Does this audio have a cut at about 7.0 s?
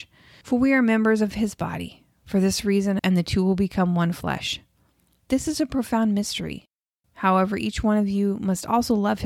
yes; 2 cuts; at 3.0 s, 7.0 s

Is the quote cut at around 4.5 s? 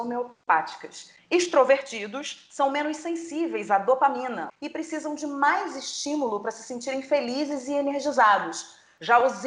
yes; 2 cuts; at 1.2 s, 4.5 s

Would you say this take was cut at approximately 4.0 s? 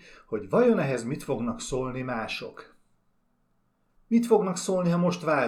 yes; 1 cut; at 4.0 s

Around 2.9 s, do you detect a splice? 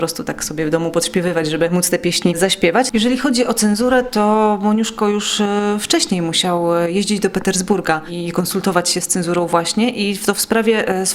yes; 1 cut; at 2.9 s

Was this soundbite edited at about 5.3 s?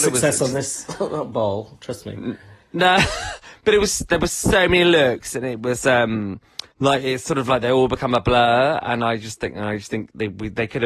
no; 1 cut; at 6.7 s

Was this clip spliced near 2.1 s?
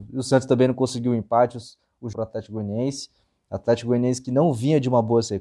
yes; 1 cut; at 2.1 s

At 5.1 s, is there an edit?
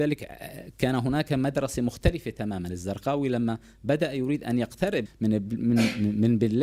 yes; 1 cut; at 5.1 s

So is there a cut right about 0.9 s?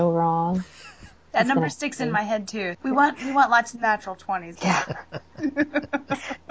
no; 2 cuts; at 2.7 s, 4.6 s

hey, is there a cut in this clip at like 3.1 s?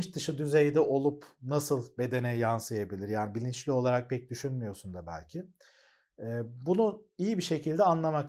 no; 0 cuts

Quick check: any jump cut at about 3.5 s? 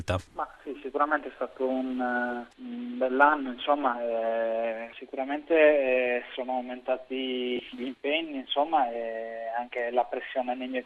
no; 0 cuts

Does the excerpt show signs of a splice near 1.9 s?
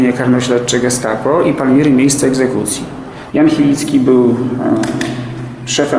no; 1 cut; at 3.3 s

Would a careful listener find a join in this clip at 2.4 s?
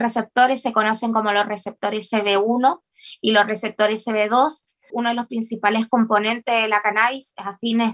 no; 1 cut; at 4.9 s

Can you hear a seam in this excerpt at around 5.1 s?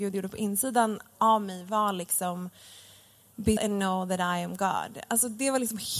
no; 1 cut; at 3.6 s

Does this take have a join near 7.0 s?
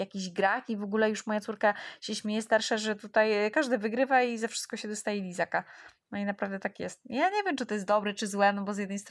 no; 0 cuts

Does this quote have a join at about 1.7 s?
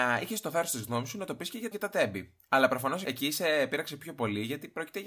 yes; 2 cuts; at 1.7 s, 3.0 s

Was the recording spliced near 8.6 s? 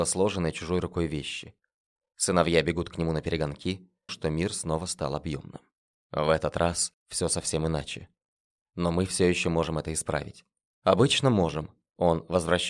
yes; 3 cuts; at 4.1 s, 7.0 s, 8.6 s

